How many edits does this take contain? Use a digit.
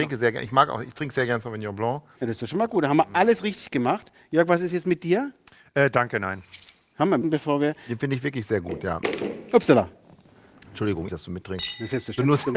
2